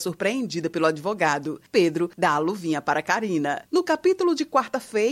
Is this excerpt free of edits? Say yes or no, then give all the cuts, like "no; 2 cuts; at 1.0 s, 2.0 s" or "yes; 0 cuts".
yes; 0 cuts